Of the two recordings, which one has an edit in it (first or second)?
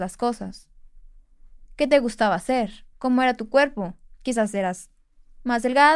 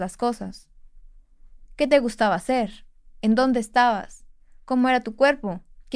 first